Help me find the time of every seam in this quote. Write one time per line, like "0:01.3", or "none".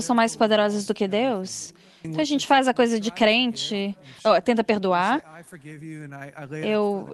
0:02.0
0:04.2